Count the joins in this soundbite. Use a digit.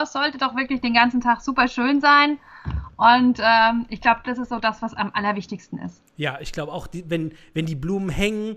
0